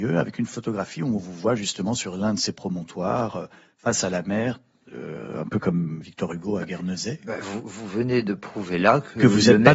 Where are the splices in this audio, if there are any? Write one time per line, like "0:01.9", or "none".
none